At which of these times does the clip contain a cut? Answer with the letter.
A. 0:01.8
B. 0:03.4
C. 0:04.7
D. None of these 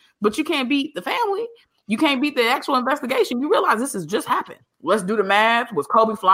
C